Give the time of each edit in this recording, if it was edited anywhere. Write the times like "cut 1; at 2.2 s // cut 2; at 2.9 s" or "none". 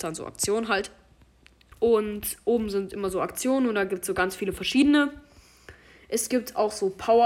cut 1; at 1.7 s